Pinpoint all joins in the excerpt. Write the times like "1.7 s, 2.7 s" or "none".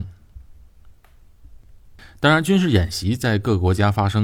none